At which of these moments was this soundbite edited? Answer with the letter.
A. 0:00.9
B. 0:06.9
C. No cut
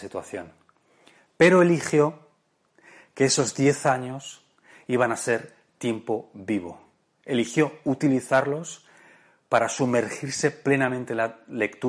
C